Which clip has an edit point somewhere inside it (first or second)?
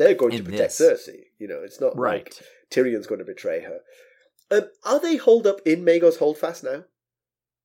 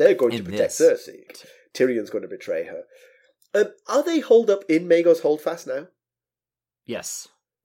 second